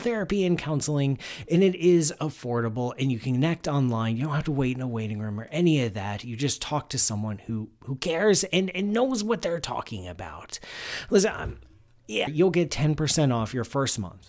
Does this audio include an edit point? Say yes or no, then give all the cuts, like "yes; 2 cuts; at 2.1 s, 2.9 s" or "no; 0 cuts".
yes; 1 cut; at 12.3 s